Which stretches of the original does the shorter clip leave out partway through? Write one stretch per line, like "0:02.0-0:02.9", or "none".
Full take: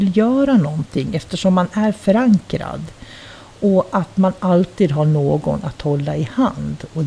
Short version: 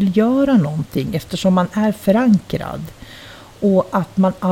none